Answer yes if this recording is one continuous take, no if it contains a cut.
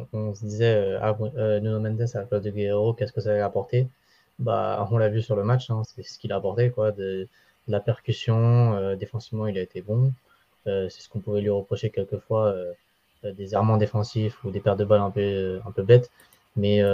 no